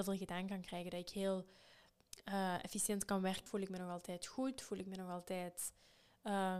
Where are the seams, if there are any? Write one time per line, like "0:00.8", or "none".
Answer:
0:03.5